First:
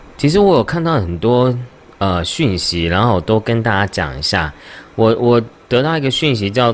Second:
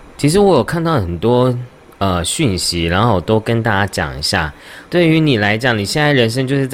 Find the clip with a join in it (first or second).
second